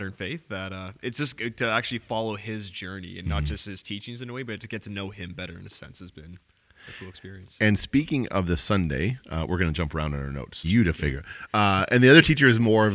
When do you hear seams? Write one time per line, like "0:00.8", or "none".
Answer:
0:07.6
0:10.6